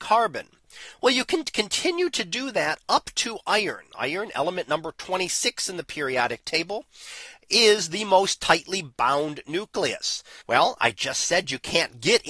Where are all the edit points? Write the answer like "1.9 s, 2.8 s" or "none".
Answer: 10.4 s